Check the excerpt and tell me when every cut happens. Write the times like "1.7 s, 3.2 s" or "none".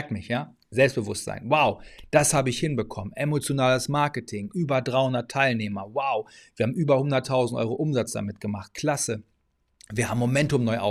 none